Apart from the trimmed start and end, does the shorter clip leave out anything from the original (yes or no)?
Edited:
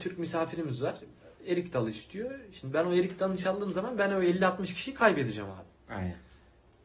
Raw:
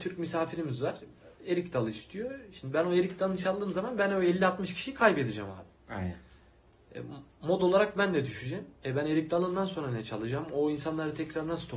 no